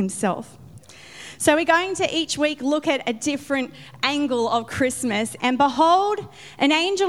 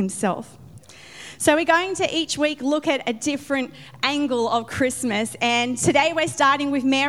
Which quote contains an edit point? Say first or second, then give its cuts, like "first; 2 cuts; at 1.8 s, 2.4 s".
first; 1 cut; at 5.4 s